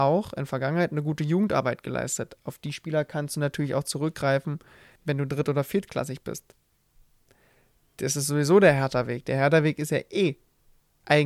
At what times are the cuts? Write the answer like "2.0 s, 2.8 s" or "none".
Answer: 5.0 s